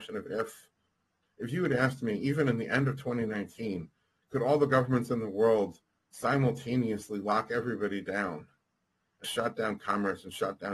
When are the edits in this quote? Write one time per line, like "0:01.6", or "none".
0:01.2
0:09.2